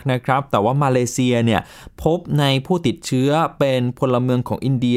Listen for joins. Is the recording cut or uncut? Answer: uncut